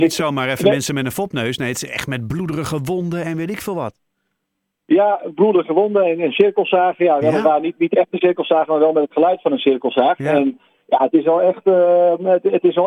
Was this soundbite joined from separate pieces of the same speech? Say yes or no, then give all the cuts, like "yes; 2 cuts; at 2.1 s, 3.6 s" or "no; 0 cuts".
no; 0 cuts